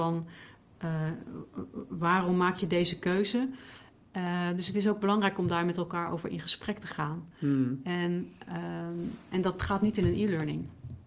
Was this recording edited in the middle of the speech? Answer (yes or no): no